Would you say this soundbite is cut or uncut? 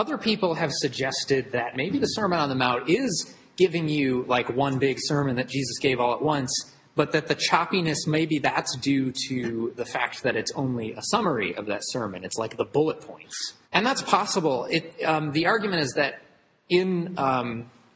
cut